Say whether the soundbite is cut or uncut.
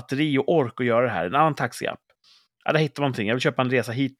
uncut